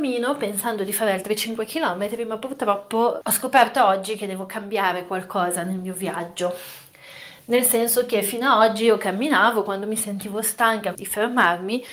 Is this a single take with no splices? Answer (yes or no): no